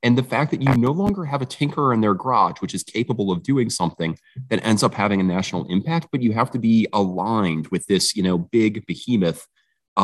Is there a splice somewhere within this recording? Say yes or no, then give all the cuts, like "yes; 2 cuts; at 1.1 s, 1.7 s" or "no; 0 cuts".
no; 0 cuts